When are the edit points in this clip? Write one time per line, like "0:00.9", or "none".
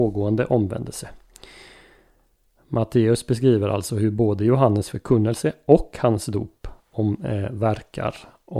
none